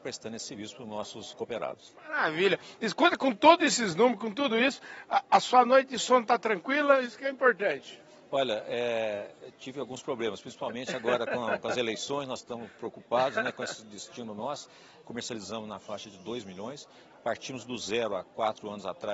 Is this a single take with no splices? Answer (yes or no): no